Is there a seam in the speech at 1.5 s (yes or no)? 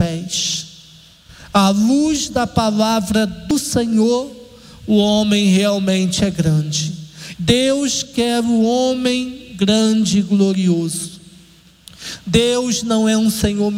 no